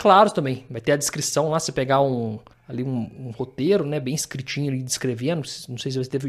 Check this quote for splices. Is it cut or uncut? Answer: uncut